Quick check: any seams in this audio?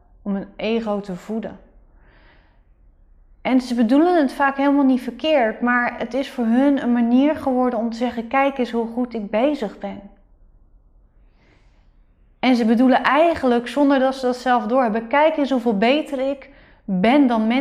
no; 0 cuts

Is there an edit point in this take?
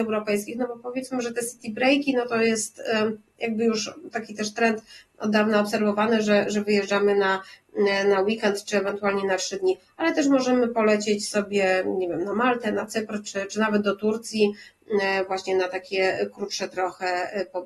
no; 0 cuts

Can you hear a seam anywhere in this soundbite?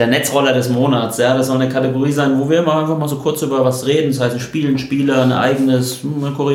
no; 0 cuts

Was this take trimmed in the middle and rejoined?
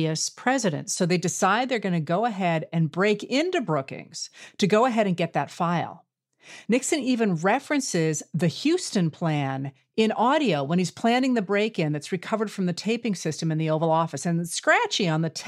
no; 0 cuts

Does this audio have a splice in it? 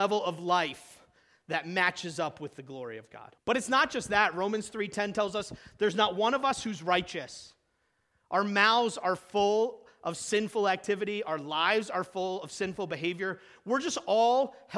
yes; 1 cut; at 3.4 s

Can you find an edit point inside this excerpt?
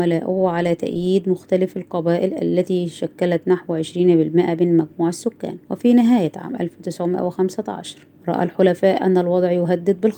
yes; 2 cuts; at 5.6 s, 8.2 s

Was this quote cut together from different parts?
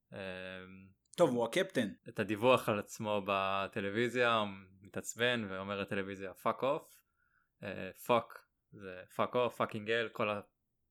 yes; 1 cut; at 2.0 s

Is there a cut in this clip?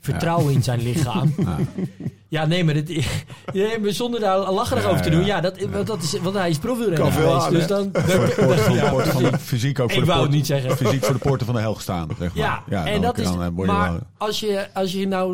no; 0 cuts

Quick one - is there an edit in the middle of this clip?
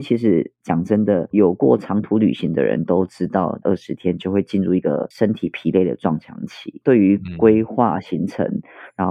yes; 2 cuts; at 1.3 s, 3.6 s

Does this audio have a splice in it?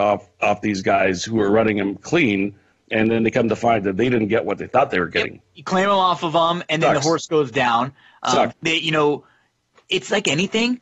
yes; 1 cut; at 8.5 s

